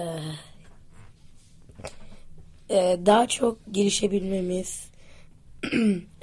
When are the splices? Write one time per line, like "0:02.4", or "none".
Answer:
none